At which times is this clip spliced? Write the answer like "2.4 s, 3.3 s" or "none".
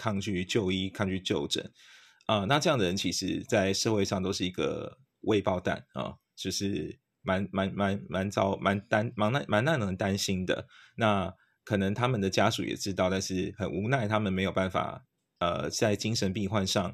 15.4 s